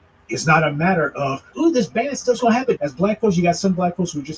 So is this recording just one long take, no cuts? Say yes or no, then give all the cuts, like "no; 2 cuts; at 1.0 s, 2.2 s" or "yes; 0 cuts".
no; 2 cuts; at 1.5 s, 2.8 s